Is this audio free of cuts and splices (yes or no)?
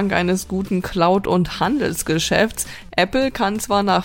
no